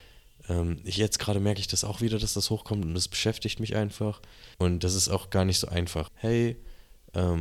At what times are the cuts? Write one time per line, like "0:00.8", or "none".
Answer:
0:04.5
0:06.1